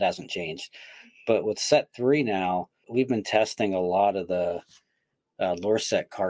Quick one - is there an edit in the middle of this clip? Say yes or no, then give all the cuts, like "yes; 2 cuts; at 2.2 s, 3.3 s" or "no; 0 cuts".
yes; 1 cut; at 2.8 s